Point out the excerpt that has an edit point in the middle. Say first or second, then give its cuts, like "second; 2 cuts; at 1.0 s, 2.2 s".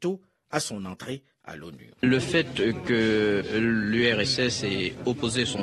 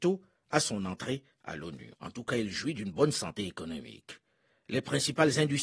second; 1 cut; at 1.9 s